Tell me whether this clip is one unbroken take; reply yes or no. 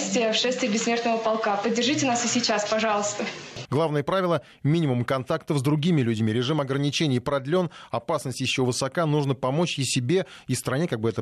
no